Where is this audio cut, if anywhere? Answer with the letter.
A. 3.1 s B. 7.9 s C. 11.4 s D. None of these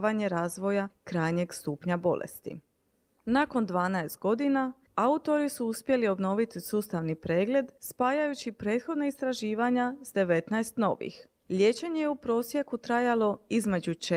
C